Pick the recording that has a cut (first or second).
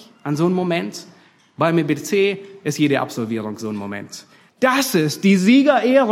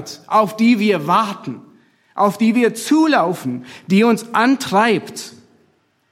first